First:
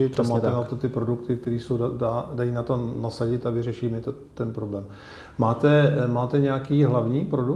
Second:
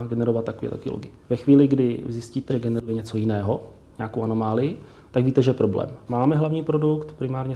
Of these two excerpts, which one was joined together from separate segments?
second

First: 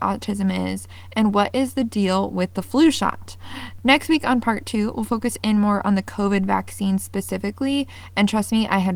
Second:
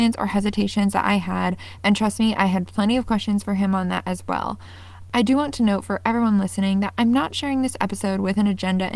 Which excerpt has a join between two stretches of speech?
second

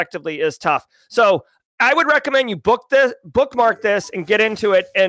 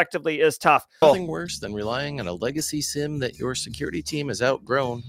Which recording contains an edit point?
second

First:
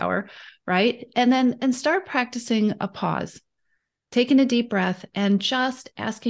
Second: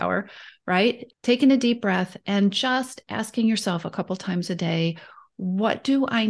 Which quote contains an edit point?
second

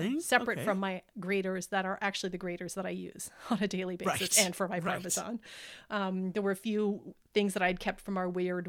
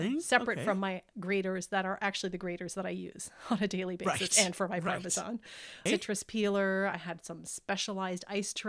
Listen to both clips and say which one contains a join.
second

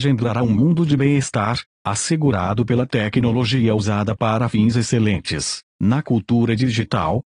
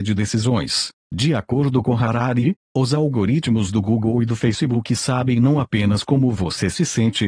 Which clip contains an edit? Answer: first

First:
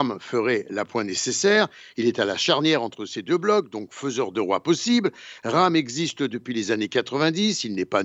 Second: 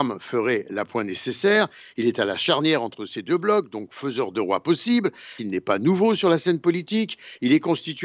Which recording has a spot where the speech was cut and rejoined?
second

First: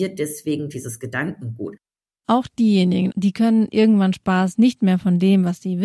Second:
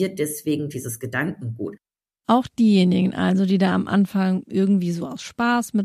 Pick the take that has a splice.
first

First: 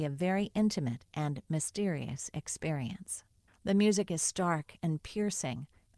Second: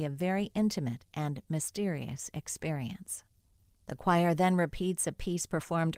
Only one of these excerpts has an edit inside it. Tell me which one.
first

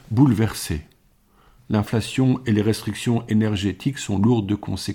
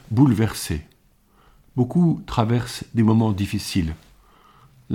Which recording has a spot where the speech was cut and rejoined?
first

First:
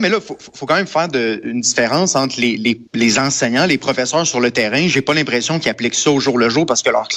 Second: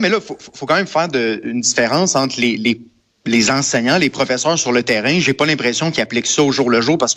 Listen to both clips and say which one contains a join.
first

